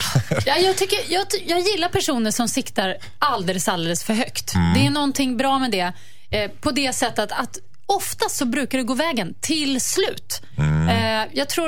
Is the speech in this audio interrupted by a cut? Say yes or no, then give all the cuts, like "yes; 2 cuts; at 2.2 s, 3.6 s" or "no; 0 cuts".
no; 0 cuts